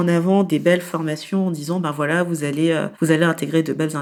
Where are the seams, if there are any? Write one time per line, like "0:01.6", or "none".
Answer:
0:02.9